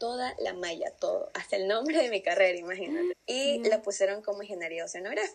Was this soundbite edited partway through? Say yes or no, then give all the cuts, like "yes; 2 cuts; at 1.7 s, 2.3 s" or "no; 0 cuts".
yes; 1 cut; at 3.1 s